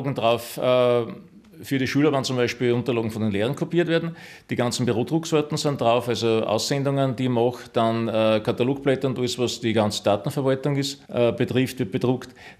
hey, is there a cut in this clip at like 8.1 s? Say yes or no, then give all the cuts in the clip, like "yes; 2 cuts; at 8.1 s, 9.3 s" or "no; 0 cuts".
no; 1 cut; at 11.1 s